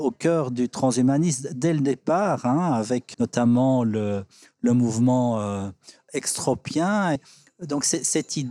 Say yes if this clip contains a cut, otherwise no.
yes